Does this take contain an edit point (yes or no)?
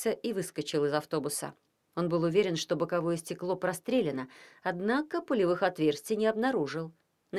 no